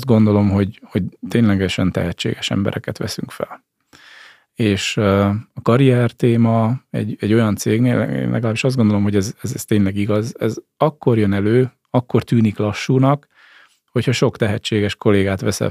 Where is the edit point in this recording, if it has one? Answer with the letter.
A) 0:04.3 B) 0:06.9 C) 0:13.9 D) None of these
D